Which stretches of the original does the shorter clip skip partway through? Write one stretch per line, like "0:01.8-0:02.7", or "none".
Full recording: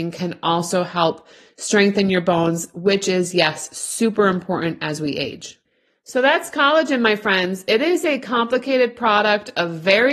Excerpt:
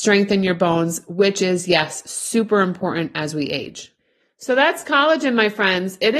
none